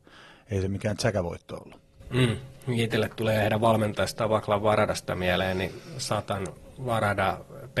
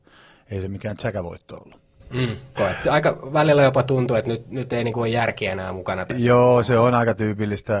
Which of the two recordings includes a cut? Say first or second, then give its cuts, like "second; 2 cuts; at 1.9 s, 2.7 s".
second; 1 cut; at 2.6 s